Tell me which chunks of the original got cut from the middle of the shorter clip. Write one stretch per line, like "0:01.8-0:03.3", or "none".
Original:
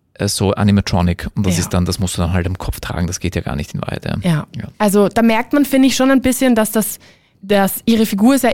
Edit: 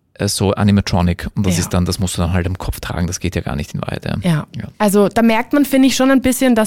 none